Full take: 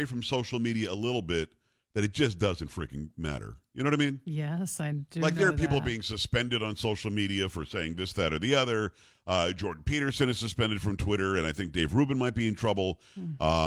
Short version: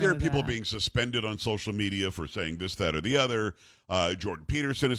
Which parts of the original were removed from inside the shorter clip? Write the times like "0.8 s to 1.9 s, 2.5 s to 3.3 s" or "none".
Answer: none